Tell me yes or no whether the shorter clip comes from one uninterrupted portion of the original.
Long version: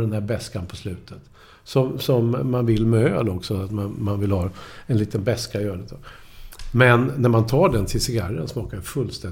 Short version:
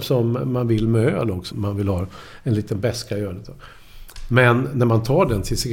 no